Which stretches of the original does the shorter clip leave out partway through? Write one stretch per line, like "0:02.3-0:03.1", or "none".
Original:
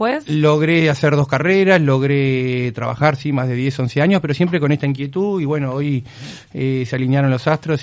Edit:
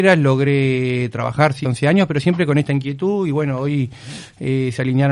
0:03.3-0:03.8